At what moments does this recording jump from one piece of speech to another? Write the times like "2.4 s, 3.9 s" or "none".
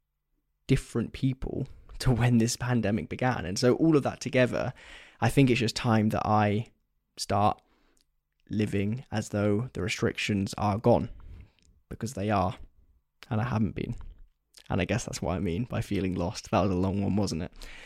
none